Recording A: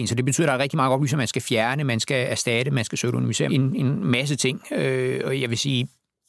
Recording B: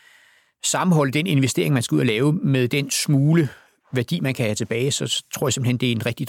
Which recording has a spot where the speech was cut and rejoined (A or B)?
A